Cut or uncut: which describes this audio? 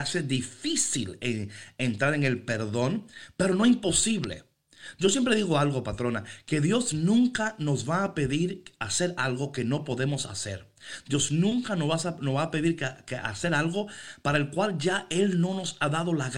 uncut